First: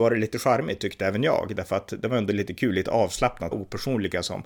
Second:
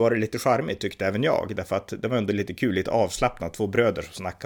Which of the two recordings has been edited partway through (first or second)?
first